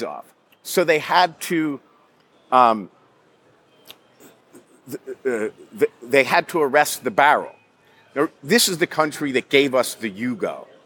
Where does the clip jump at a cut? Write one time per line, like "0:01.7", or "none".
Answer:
0:08.4